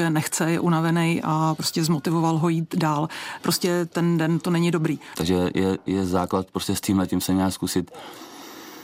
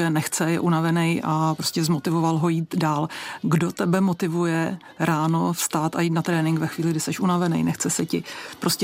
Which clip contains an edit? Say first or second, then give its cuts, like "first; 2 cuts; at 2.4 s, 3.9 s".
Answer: first; 2 cuts; at 3.4 s, 5.2 s